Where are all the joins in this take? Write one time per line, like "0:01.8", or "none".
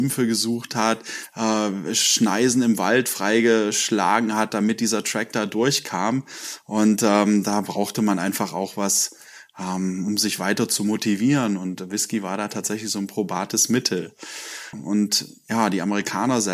0:14.7